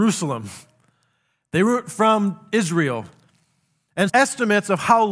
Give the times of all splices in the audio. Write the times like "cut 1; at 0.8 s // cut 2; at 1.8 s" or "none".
cut 1; at 4.1 s